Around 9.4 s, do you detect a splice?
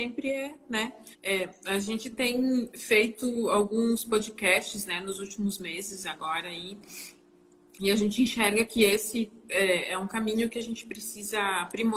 no; 1 cut; at 1.1 s

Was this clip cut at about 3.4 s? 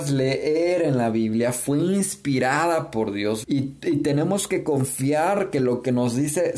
yes; 1 cut; at 3.4 s

